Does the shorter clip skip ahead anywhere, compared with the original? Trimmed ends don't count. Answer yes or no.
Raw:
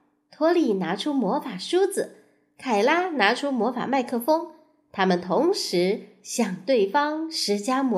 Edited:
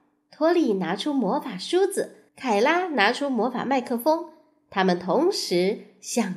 yes